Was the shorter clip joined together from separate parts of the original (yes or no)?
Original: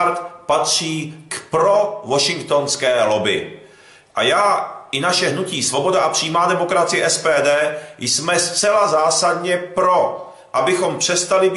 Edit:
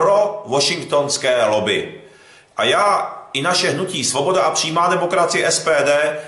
no